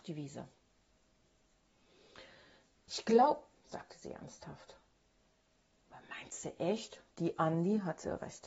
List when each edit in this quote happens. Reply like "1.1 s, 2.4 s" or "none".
3.5 s, 7.1 s